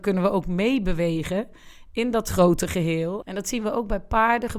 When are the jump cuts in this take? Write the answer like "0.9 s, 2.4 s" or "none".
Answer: 3.2 s